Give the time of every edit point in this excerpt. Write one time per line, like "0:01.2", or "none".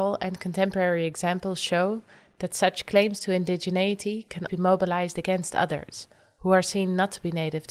0:04.5